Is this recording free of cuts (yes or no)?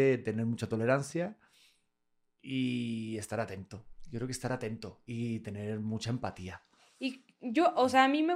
yes